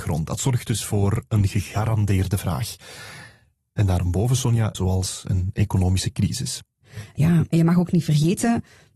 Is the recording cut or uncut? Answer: cut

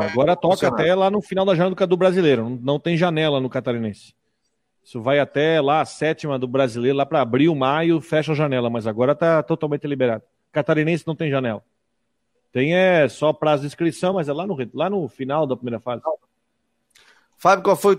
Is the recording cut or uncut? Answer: uncut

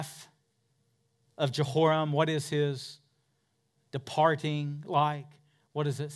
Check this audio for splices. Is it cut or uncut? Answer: uncut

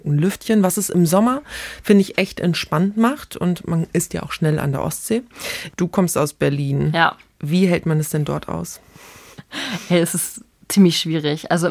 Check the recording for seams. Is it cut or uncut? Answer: uncut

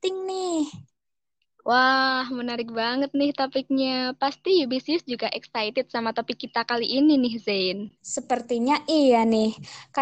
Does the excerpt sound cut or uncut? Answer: cut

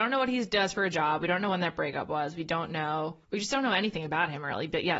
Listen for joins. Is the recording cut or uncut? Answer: cut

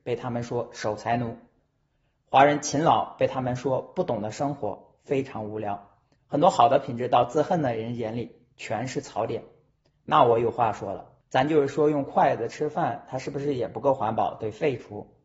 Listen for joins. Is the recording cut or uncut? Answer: uncut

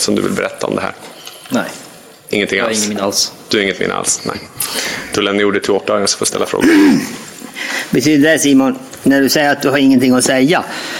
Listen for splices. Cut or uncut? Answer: uncut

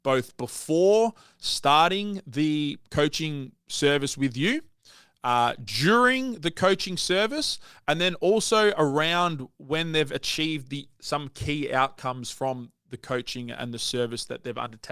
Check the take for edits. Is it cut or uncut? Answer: uncut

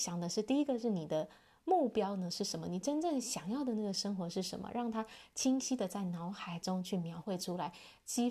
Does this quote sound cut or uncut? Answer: uncut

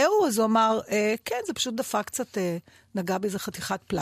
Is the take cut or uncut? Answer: uncut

